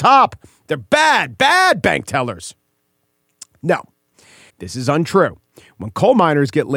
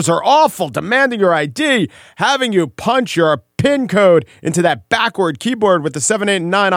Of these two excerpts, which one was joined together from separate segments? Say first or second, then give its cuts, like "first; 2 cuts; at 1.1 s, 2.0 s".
first; 1 cut; at 4.5 s